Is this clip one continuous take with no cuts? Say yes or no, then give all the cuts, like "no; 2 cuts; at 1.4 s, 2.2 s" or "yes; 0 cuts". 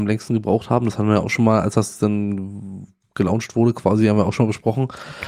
yes; 0 cuts